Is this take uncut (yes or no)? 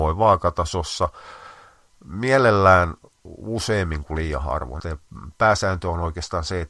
no